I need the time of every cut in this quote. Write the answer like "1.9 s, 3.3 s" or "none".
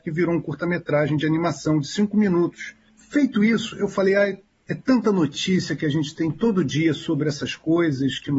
none